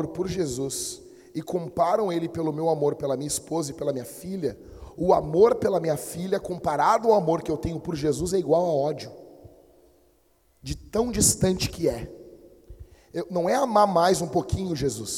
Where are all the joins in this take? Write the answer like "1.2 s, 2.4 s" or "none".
none